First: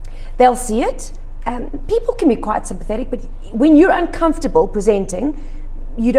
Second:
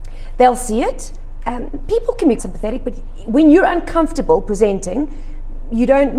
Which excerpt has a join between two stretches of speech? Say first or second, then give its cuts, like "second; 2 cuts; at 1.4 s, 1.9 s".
second; 1 cut; at 2.4 s